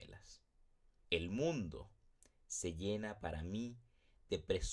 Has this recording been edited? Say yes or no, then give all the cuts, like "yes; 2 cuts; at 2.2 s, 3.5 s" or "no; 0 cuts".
yes; 1 cut; at 1.0 s